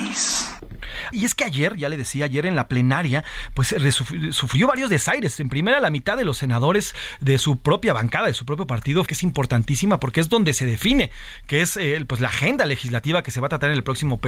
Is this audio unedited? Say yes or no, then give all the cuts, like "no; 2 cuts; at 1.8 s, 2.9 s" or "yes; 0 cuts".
no; 2 cuts; at 1.1 s, 9.1 s